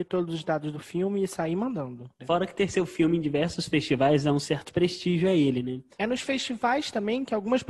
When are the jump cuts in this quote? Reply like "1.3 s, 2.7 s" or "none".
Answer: 2.2 s, 6.0 s